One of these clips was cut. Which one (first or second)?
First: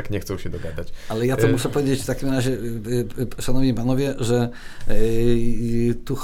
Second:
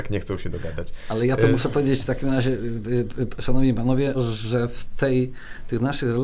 second